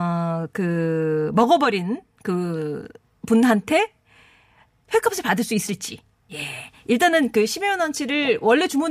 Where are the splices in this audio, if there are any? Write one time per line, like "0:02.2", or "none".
none